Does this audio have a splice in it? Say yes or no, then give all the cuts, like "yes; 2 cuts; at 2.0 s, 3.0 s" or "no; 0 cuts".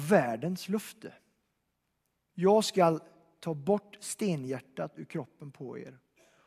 yes; 1 cut; at 2.3 s